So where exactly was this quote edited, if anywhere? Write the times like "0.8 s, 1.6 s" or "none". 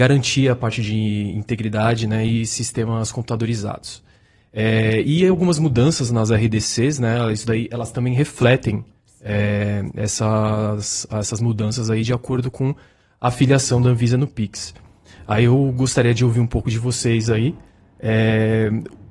none

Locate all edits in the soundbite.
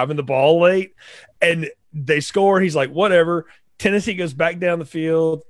none

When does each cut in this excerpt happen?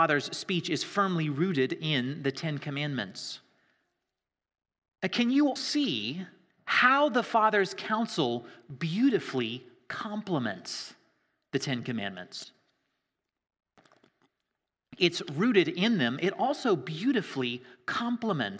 5.6 s

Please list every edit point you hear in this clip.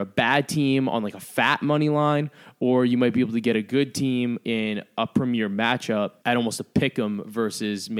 6.2 s

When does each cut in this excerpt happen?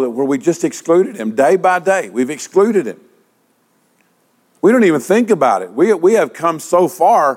none

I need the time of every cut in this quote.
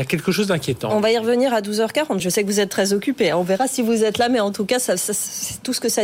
2.2 s

